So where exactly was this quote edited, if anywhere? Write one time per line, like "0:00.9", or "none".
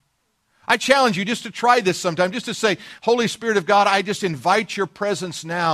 none